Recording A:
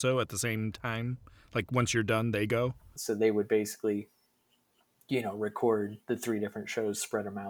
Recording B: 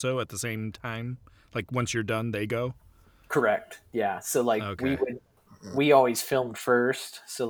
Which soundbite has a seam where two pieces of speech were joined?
A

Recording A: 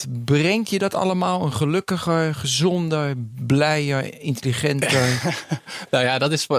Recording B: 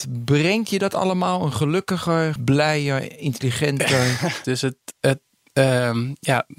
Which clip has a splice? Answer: B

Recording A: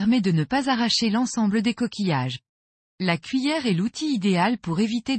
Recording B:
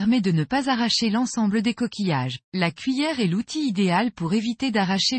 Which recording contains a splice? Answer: B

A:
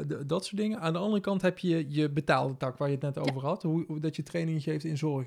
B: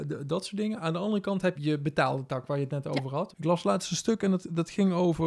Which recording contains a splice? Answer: B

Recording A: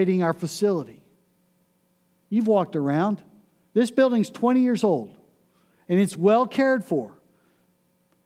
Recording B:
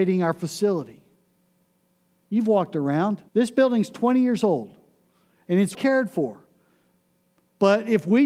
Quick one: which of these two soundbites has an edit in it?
B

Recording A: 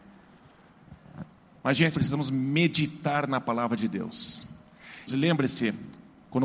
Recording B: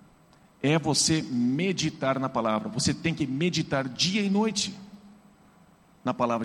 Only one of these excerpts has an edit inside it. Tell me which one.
A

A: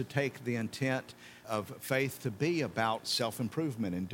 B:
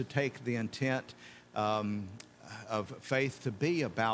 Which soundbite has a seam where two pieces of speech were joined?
A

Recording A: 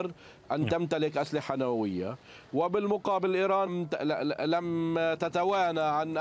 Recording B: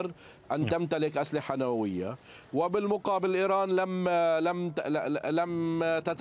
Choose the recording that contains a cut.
A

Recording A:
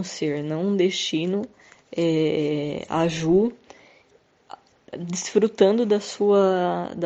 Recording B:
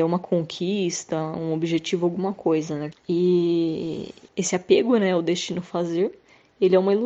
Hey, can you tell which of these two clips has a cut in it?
B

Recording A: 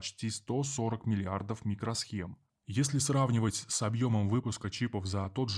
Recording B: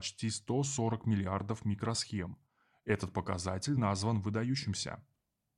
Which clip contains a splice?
A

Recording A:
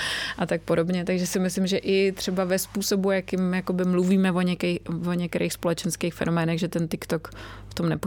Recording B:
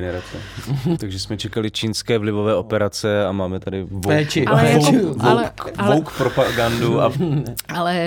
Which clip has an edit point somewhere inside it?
B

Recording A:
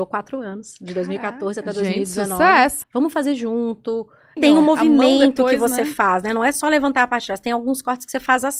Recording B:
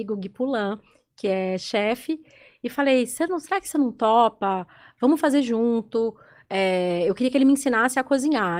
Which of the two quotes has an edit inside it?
A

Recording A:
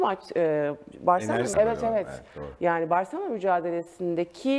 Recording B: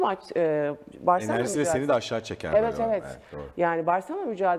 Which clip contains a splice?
A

